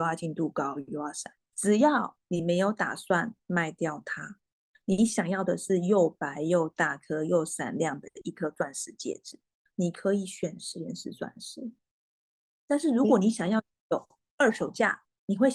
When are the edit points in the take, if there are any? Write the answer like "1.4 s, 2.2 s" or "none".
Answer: 1.5 s